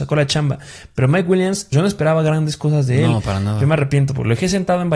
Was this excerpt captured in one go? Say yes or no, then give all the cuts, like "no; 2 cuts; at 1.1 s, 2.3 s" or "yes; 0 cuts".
no; 1 cut; at 1.7 s